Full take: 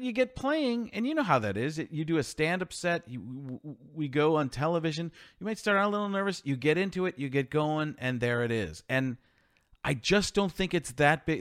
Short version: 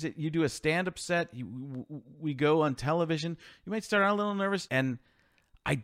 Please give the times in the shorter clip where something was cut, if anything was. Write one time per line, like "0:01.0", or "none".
0:04.7